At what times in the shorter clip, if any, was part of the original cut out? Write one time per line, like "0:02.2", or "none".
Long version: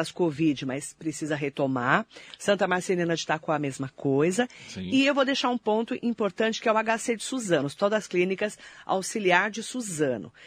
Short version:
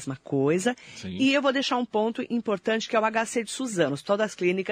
none